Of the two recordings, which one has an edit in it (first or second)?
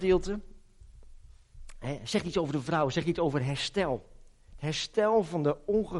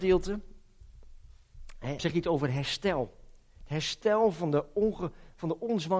second